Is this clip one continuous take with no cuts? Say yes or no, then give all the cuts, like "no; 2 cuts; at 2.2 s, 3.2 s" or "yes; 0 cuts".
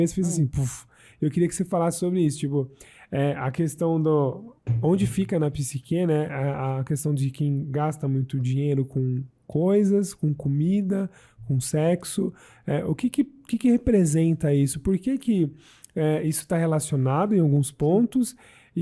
yes; 0 cuts